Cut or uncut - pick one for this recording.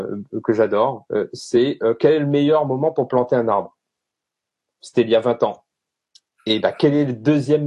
uncut